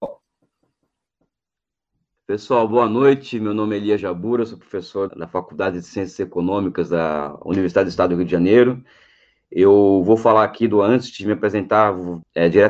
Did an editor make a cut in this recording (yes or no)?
yes